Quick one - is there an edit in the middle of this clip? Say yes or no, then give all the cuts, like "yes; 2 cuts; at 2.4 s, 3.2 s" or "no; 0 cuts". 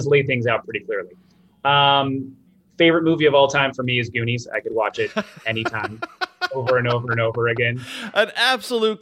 no; 0 cuts